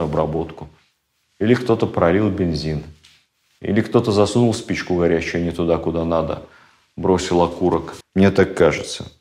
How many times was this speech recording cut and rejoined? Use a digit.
1